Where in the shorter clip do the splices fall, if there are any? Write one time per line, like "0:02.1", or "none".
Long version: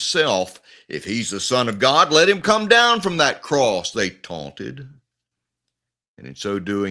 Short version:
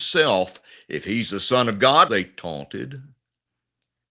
0:02.1

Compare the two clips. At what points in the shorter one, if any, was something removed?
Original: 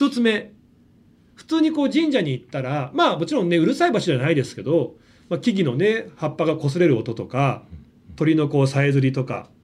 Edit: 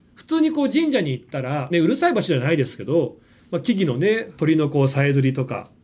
0:01.7
0:04.4

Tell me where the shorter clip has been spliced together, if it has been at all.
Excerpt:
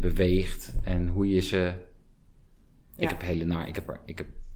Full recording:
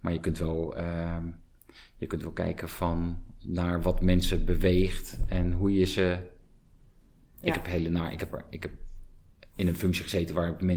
none

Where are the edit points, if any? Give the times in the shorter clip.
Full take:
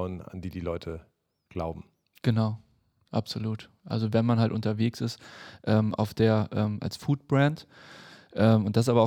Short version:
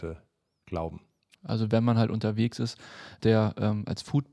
0:01.3
0:03.2

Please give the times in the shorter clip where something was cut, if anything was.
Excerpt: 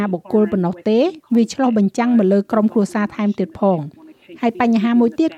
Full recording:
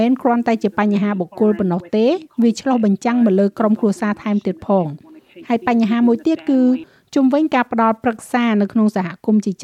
none

